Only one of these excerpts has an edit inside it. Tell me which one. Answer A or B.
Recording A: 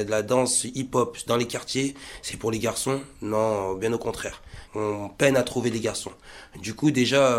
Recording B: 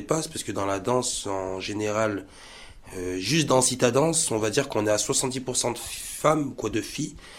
A